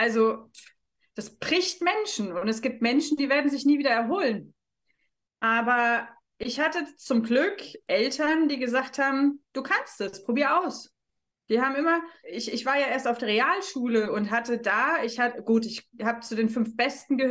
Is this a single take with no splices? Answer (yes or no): no